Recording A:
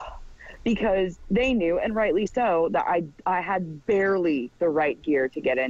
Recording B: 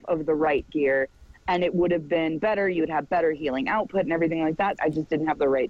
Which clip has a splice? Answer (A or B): B